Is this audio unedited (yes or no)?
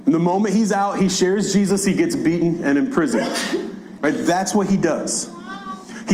no